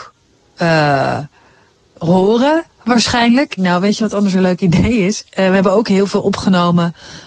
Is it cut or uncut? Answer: cut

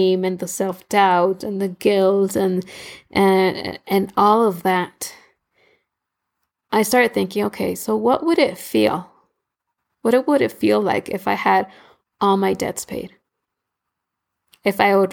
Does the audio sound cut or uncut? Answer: uncut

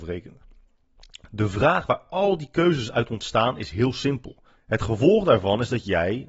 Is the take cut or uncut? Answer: cut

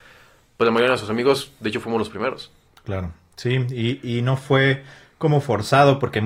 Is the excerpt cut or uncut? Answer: uncut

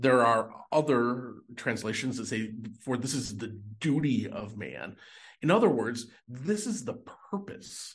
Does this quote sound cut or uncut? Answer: uncut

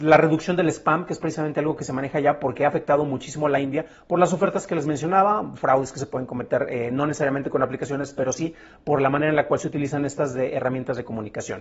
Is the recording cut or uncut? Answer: uncut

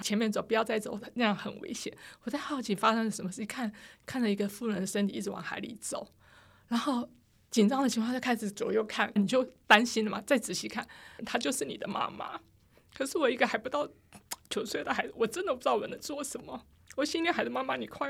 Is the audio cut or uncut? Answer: cut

